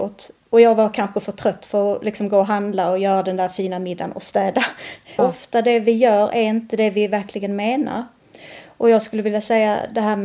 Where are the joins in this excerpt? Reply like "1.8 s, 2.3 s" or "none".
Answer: 5.2 s